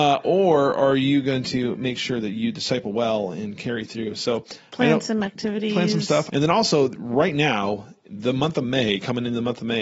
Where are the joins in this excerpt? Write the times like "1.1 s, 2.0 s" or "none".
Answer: 6.3 s